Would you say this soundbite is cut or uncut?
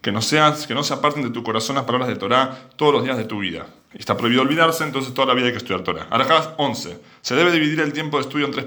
cut